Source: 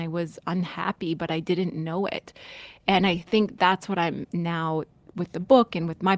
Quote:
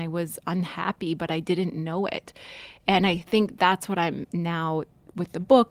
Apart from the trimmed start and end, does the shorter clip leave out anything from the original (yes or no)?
no